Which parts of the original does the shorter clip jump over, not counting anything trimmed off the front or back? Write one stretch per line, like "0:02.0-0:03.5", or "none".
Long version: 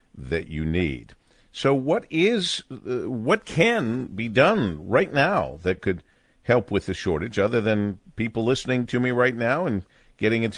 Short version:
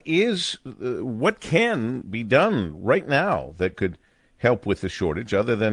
none